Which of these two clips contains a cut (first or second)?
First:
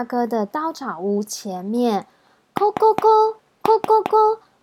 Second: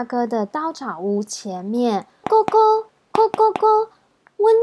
second